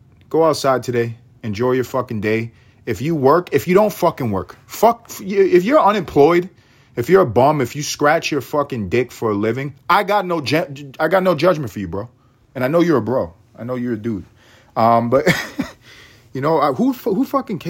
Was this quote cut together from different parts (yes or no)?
no